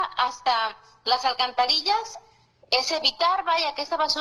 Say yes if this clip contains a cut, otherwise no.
no